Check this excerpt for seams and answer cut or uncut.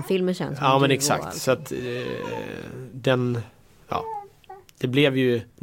uncut